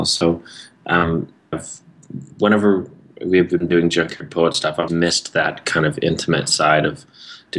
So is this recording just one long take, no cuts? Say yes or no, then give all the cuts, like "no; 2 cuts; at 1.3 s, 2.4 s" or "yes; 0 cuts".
no; 2 cuts; at 1.5 s, 4.9 s